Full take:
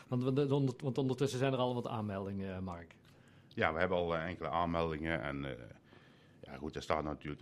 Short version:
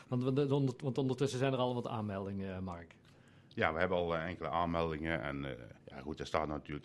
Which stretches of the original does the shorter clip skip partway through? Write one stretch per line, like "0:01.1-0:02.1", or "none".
0:05.8-0:06.4